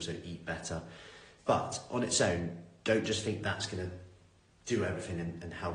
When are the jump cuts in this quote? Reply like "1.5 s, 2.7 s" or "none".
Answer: 1.4 s